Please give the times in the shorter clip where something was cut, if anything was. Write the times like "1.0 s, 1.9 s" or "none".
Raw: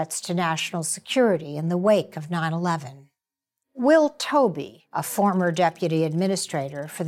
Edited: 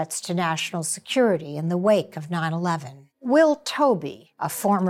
3.1 s

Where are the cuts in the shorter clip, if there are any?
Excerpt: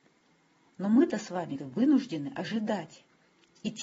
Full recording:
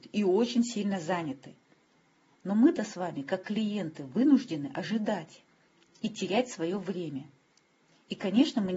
1.6 s

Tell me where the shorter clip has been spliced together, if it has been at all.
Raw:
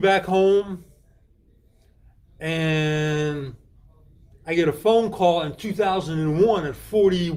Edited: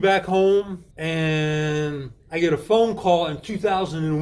0.9 s, 2.2 s

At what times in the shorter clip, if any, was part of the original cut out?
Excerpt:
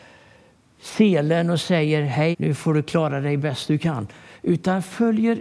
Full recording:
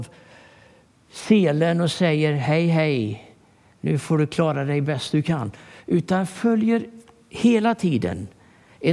2.3 s

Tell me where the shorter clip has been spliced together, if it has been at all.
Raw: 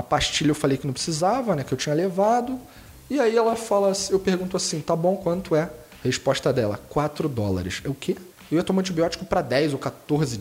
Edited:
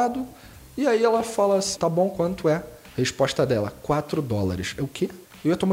1.8 s

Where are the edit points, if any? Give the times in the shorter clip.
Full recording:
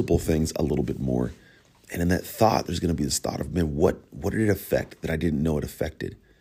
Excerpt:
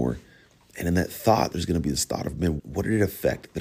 2.6 s

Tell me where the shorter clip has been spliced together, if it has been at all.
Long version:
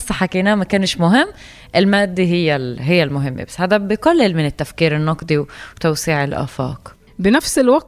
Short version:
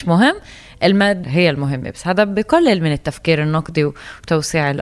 1.2 s

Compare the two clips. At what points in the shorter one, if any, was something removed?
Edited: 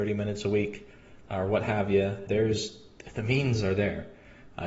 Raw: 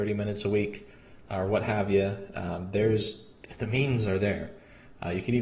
2.3 s

